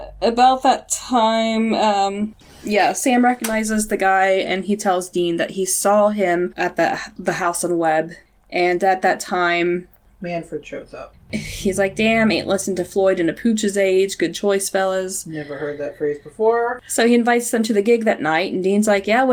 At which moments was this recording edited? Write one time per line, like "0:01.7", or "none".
none

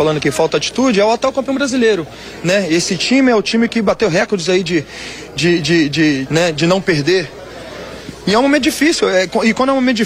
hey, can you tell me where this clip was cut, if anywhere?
0:06.3

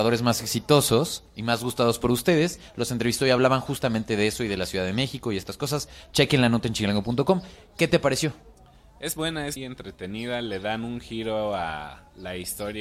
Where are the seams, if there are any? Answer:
0:09.6

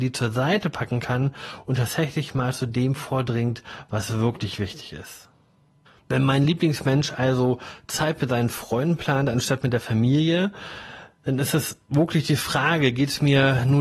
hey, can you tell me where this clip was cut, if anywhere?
none

